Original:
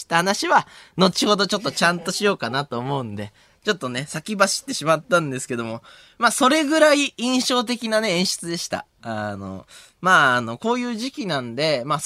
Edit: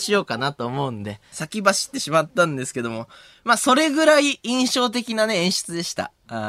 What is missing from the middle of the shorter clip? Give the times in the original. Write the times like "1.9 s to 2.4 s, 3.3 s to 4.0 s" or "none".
3.4 s to 4.1 s